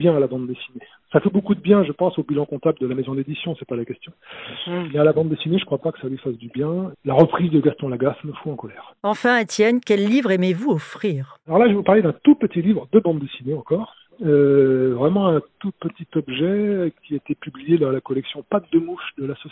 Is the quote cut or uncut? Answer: uncut